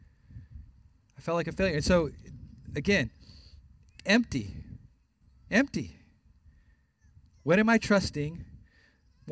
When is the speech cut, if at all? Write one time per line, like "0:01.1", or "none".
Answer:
none